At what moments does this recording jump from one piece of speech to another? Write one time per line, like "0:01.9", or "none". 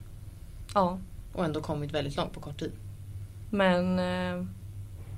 0:03.4